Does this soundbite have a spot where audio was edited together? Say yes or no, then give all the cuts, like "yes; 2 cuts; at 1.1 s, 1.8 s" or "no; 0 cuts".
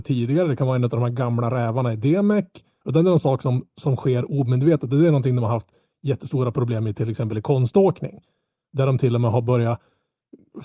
yes; 1 cut; at 2.8 s